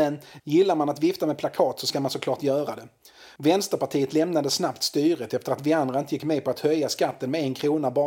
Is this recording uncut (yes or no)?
yes